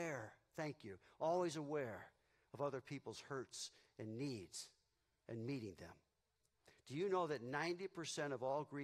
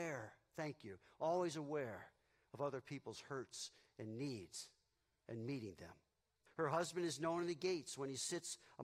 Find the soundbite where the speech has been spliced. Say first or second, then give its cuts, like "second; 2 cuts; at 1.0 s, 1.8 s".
second; 1 cut; at 6.5 s